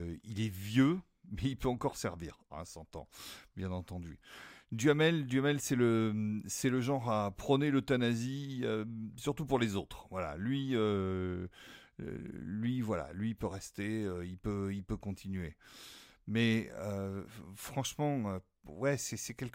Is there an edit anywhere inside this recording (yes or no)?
yes